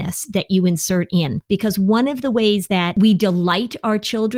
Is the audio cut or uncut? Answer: uncut